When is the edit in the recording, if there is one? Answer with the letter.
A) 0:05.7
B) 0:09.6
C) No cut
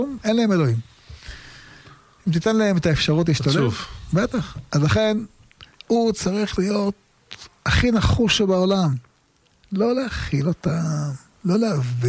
A